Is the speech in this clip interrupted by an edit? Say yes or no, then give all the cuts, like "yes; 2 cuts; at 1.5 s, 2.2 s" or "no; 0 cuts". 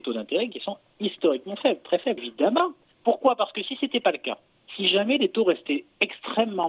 yes; 2 cuts; at 2.2 s, 4.6 s